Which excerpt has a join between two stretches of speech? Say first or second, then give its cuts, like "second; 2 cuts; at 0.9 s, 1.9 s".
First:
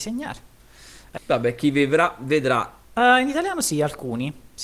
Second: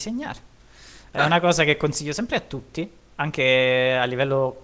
first; 2 cuts; at 1.2 s, 2.8 s